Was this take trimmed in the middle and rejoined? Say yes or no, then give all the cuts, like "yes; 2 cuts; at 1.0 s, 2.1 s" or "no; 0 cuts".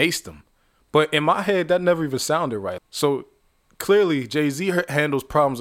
yes; 1 cut; at 2.8 s